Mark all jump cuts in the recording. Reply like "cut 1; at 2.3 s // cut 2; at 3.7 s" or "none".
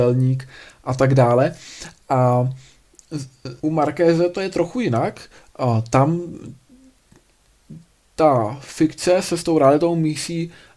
cut 1; at 3.6 s